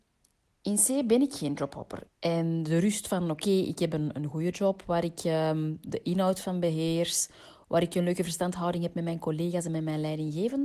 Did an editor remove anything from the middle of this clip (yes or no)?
yes